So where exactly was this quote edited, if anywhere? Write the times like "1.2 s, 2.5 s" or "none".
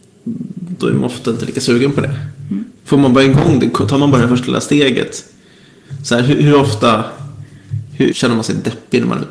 8.1 s